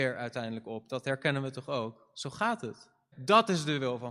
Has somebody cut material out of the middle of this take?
yes; 1 cut; at 3.1 s

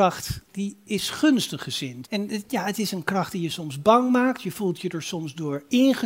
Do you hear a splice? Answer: yes; 1 cut; at 2.0 s

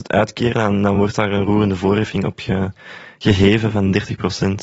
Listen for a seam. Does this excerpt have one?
no; 0 cuts

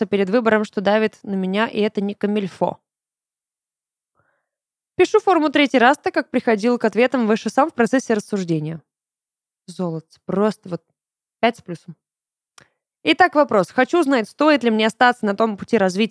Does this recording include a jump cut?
no; 0 cuts

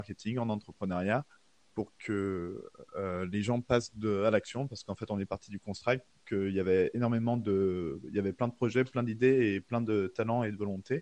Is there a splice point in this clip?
no; 0 cuts

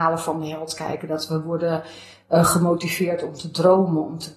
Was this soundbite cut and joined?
no; 0 cuts

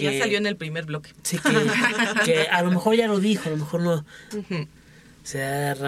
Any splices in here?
yes; 1 cut; at 4.3 s

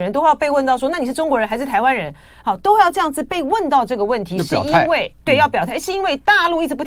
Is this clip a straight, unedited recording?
yes; 0 cuts

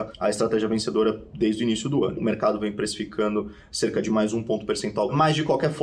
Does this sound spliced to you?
yes; 1 cut; at 2.2 s

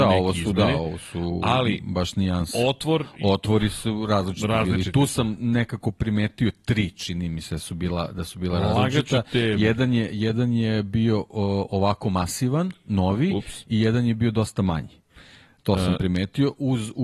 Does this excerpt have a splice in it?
no; 0 cuts

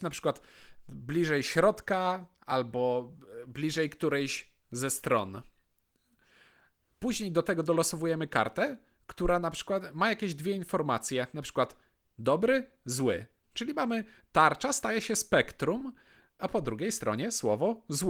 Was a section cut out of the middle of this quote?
yes; 2 cuts; at 13.4 s, 16.4 s

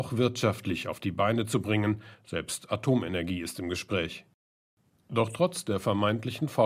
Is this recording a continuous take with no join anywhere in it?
yes; 0 cuts

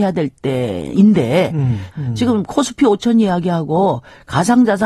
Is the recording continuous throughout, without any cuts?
no; 1 cut; at 1.9 s

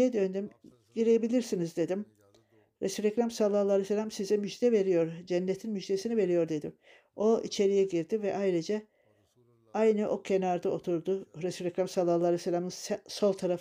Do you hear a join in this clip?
no; 0 cuts

